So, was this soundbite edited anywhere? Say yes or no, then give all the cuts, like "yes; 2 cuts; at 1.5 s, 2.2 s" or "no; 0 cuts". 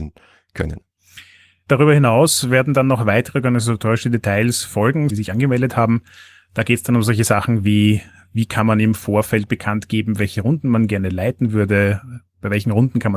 yes; 1 cut; at 5.1 s